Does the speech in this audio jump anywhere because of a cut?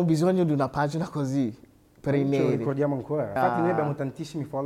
yes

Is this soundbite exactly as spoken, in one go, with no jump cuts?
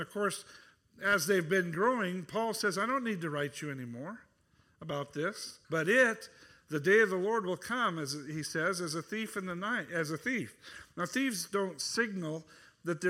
no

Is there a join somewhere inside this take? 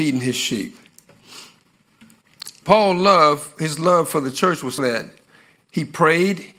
yes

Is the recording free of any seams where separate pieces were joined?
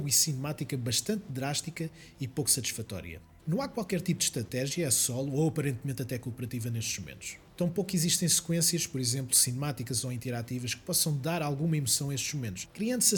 no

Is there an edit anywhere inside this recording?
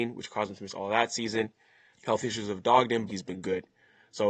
yes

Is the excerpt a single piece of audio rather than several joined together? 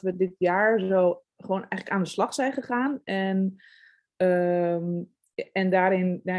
yes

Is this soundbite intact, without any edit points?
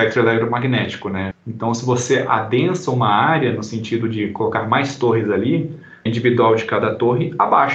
no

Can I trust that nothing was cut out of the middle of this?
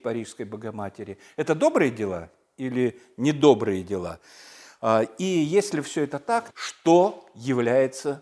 no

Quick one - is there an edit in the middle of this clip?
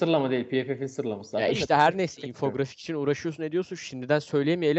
no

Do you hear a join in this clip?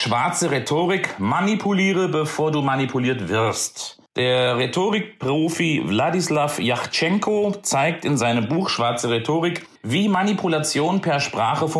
yes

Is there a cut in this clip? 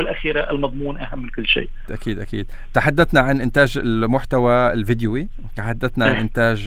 yes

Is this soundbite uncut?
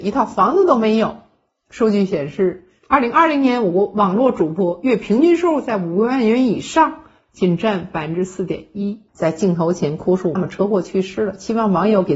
no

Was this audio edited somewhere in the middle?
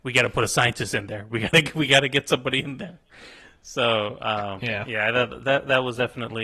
no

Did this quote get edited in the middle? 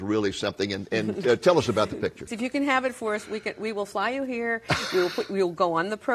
yes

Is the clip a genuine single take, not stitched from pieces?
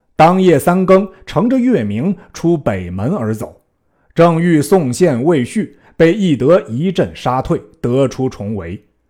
yes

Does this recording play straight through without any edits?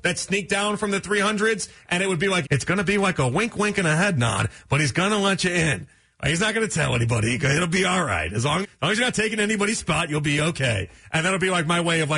no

